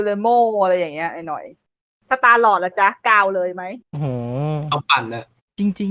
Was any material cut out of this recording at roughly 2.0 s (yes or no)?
no